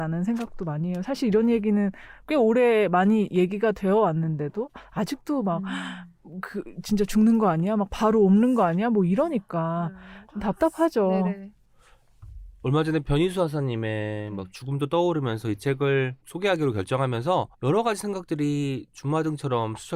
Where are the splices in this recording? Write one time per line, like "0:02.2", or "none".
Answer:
0:16.2
0:17.5